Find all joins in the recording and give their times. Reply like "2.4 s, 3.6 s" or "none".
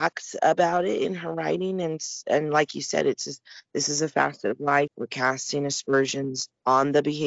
4.9 s